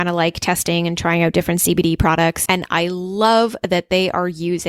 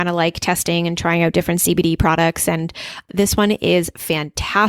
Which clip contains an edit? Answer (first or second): first